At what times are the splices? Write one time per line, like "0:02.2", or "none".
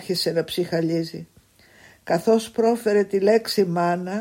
none